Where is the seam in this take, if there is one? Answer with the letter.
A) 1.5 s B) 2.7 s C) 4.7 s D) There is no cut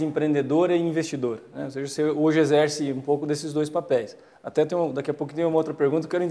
D